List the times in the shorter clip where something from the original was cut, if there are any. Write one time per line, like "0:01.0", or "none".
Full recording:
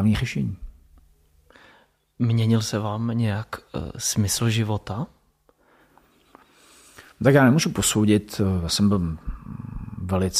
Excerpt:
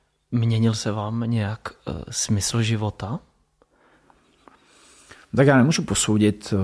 none